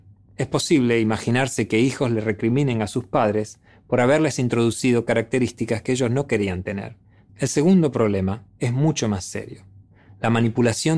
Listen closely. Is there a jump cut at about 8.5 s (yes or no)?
yes